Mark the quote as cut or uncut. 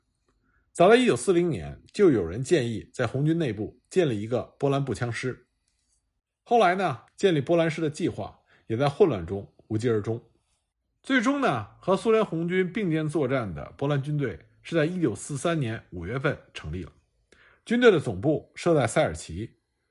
cut